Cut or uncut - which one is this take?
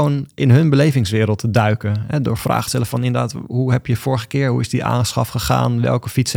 uncut